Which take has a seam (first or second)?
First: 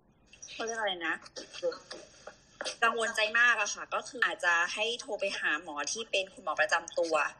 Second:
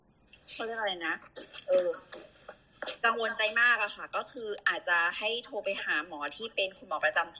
first